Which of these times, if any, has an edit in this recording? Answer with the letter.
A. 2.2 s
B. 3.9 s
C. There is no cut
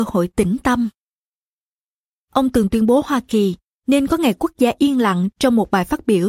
A